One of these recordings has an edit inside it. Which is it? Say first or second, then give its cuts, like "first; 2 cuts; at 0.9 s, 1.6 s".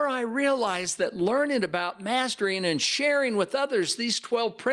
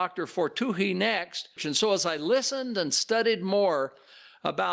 second; 1 cut; at 1.6 s